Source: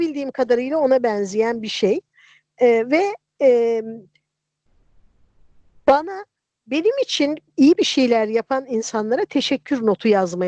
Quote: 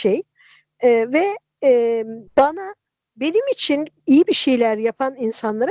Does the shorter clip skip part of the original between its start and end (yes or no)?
yes